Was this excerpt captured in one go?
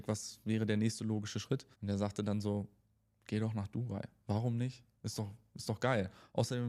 no; 1 cut; at 1.7 s

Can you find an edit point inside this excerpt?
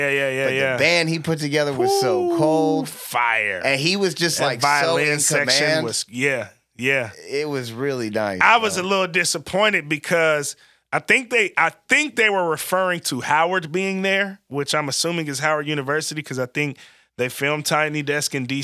no; 0 cuts

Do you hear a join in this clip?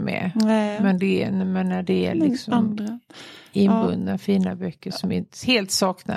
no; 0 cuts

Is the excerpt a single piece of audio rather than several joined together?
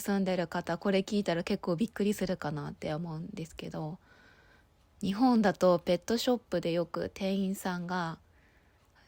yes; 0 cuts

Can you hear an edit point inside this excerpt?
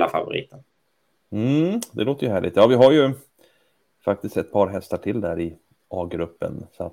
no; 0 cuts

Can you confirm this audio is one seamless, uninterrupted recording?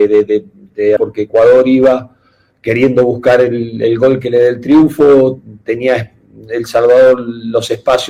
no; 1 cut; at 1.0 s

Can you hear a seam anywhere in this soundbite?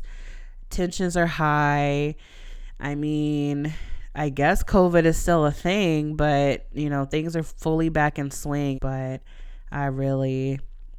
yes; 1 cut; at 8.7 s

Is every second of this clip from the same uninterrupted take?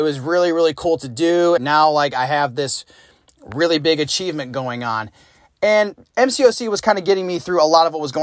no; 1 cut; at 1.6 s

